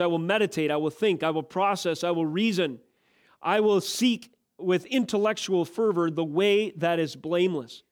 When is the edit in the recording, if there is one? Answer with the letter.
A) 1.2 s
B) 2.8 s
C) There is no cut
C